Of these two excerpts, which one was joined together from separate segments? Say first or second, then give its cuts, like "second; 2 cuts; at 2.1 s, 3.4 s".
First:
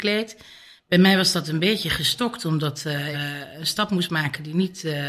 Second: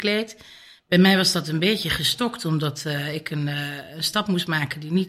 first; 1 cut; at 3.1 s